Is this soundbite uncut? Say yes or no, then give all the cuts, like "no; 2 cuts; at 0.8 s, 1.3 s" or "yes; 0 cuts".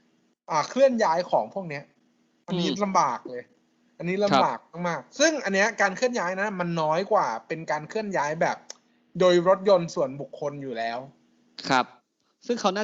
yes; 0 cuts